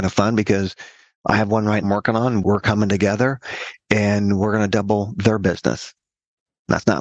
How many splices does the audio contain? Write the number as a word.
one